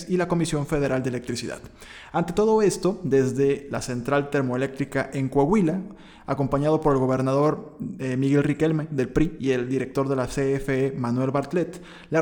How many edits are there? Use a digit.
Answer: 0